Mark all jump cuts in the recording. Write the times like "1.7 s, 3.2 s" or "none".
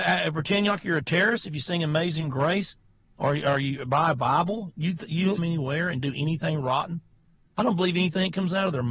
5.4 s